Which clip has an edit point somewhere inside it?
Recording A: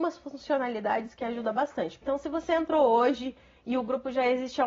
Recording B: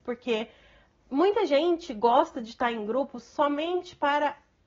A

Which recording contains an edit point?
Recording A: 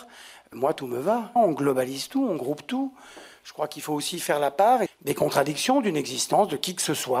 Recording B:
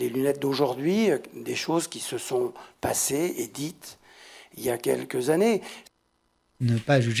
A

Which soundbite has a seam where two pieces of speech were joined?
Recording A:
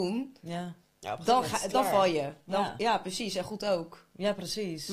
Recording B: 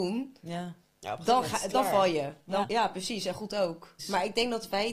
B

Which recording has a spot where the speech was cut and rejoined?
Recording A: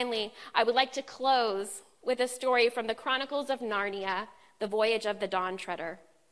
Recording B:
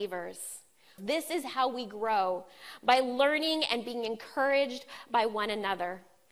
B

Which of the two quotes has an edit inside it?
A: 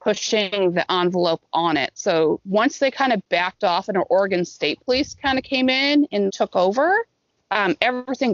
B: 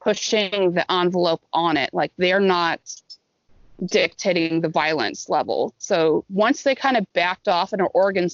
A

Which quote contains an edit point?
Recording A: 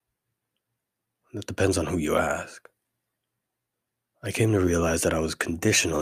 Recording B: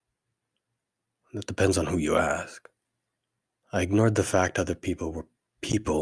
B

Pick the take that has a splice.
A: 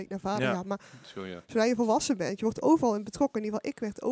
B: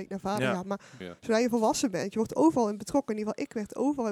B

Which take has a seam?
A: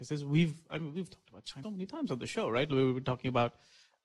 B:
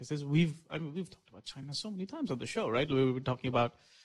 A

